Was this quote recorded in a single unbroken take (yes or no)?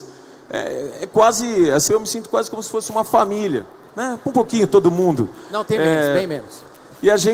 no